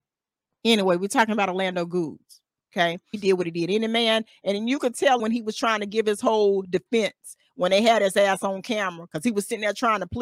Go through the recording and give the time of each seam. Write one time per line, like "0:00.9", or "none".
0:03.1
0:05.2